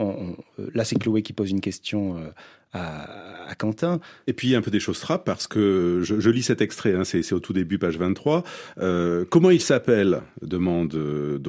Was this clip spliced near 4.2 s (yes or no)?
yes